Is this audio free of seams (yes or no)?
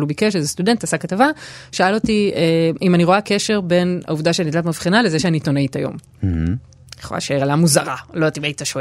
yes